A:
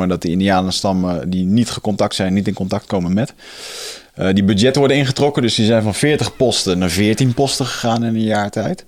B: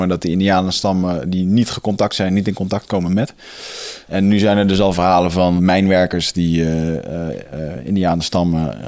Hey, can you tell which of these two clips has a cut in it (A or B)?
B